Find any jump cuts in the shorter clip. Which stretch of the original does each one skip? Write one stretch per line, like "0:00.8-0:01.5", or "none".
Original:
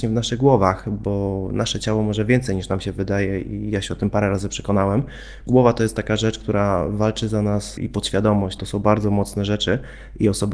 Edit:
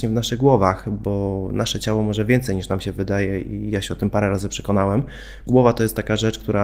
none